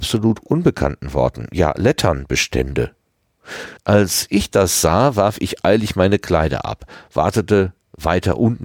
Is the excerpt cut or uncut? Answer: cut